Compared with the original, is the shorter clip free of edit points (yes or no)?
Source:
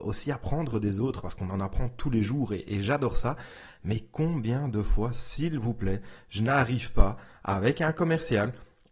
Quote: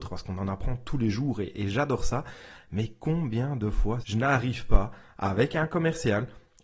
no